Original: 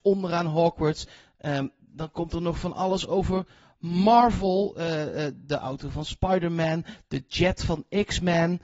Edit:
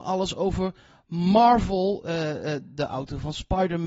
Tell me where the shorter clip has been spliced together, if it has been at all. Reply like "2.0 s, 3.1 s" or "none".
none